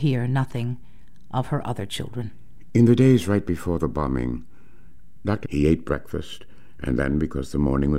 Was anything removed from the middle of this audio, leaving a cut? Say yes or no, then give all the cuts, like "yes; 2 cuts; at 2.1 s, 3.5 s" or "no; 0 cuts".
yes; 1 cut; at 5.4 s